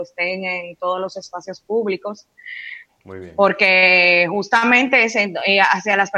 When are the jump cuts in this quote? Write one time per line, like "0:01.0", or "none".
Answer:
0:02.9